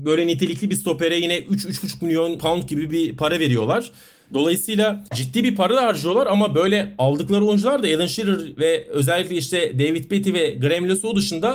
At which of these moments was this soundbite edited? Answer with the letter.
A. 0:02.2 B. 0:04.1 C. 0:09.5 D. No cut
D